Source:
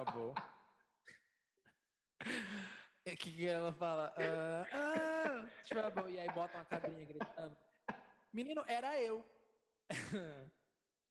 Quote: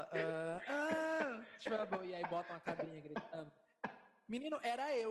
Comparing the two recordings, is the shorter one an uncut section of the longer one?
yes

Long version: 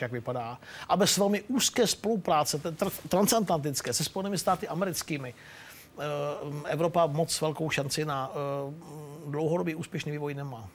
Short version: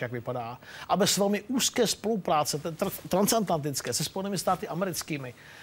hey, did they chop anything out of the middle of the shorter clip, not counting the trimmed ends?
no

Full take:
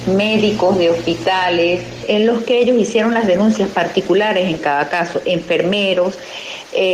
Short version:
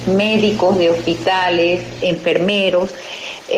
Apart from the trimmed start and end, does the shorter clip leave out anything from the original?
yes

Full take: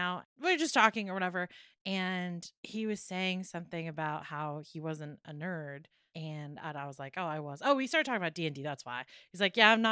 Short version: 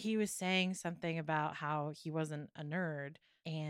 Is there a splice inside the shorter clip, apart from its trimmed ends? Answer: no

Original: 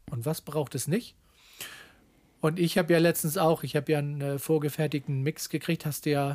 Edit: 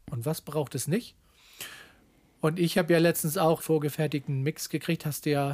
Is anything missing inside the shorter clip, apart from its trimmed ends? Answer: yes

